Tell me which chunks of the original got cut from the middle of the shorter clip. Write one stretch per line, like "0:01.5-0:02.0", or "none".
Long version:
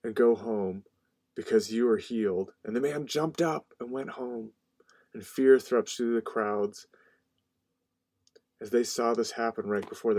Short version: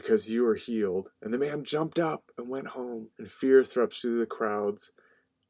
0:04.6-0:05.1